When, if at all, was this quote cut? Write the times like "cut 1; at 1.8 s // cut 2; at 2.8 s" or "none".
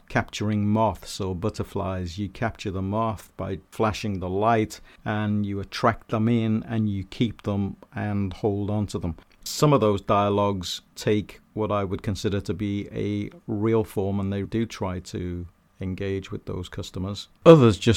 cut 1; at 9.4 s // cut 2; at 14.4 s

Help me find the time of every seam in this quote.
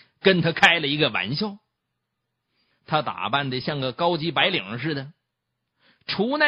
cut 1; at 2.7 s

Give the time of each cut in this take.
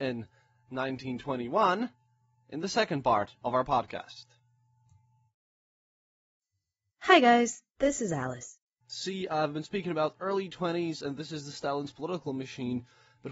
cut 1; at 8.8 s

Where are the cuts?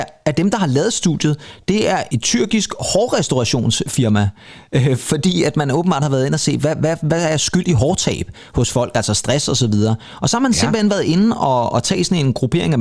none

